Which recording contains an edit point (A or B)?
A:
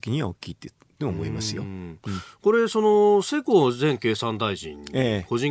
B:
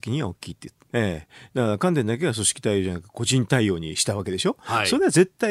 B